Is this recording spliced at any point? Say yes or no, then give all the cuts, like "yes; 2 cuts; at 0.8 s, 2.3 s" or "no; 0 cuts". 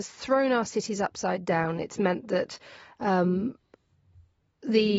no; 0 cuts